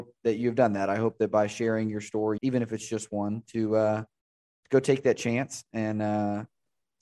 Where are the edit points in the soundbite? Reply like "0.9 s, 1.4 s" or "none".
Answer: 2.4 s